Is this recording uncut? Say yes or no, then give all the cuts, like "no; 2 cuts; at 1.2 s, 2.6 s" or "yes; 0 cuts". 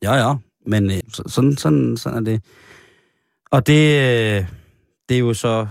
no; 1 cut; at 1.0 s